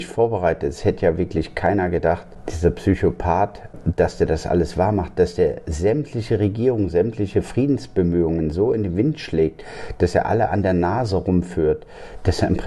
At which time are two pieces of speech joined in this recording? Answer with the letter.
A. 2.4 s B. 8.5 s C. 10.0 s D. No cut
A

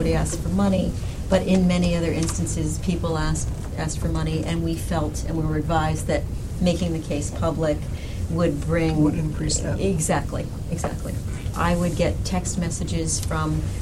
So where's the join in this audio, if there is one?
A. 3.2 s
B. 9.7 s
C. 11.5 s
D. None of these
C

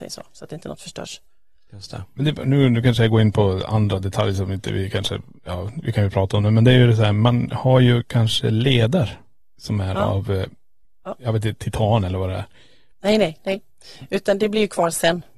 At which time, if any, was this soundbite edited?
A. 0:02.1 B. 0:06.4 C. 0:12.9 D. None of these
C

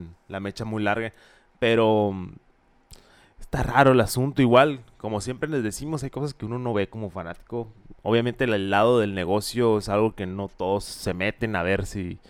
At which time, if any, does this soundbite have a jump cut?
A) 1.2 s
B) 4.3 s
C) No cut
C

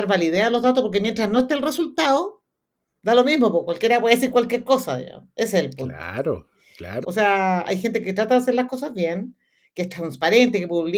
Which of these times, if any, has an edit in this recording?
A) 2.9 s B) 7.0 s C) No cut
B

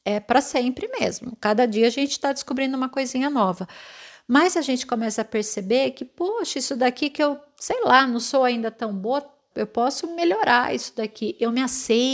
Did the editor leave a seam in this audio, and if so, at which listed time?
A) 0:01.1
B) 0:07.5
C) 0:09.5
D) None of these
C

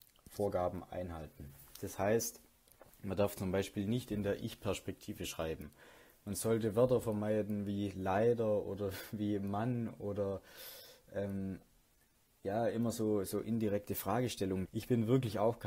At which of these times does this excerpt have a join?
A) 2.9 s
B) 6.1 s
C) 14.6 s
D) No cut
C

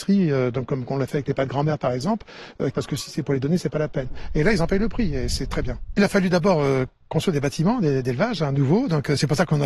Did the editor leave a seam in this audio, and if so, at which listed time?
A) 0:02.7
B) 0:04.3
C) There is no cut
A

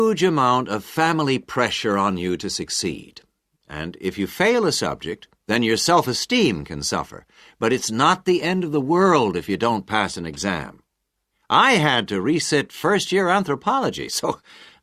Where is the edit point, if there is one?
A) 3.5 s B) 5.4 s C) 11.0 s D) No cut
B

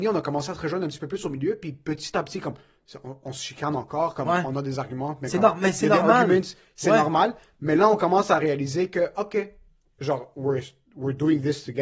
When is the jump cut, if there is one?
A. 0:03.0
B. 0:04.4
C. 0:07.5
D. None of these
D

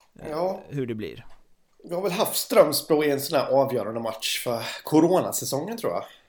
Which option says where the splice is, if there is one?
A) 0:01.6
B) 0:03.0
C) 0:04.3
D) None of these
D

